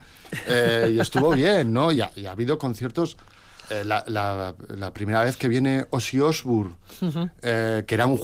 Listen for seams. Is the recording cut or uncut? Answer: uncut